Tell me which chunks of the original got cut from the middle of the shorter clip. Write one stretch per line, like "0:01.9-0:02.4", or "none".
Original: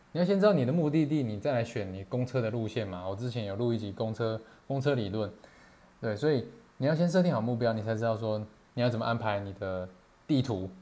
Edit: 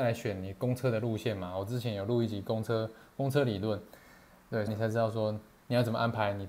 0:06.2-0:07.7

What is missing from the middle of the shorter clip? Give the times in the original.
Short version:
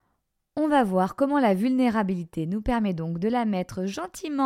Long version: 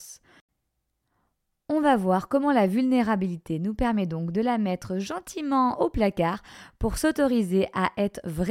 none

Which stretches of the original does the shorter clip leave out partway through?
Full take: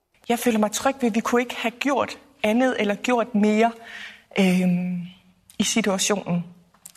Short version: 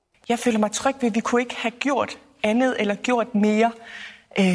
none

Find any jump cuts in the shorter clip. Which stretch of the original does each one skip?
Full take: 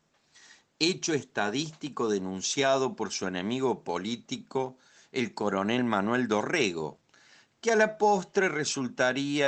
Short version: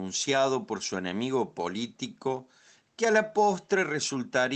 0:05.1-0:07.4

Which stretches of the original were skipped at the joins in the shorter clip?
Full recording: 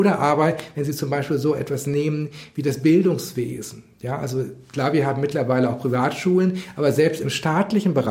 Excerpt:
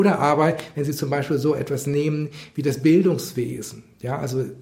none

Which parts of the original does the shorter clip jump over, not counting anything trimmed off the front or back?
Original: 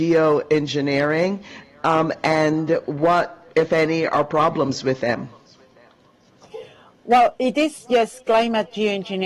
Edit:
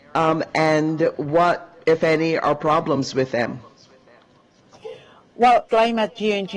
0:07.4-0:08.2

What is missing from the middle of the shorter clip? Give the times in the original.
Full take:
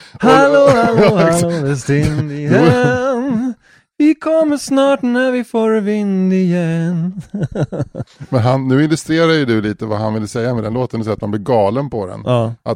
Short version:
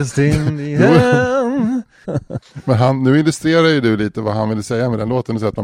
0:03.8-0:07.7

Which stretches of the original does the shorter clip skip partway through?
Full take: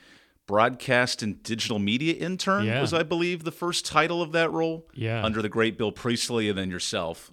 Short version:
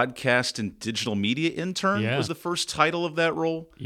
0:02.9-0:03.4

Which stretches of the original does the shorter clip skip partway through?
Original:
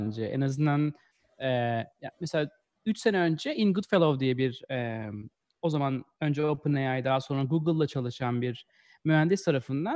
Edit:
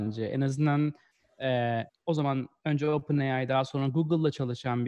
0:01.9-0:05.4

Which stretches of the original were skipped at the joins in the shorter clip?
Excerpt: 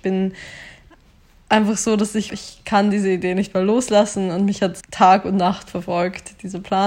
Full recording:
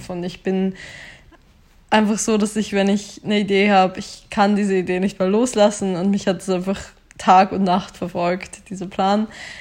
0:02.7-0:03.9
0:06.5-0:07.1

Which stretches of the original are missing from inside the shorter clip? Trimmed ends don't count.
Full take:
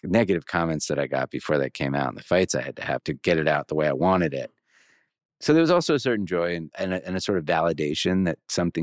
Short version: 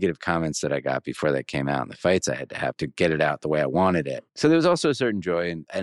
0:04.5-0:05.3

